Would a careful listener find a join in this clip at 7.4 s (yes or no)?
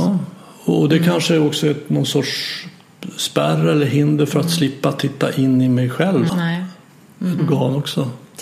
yes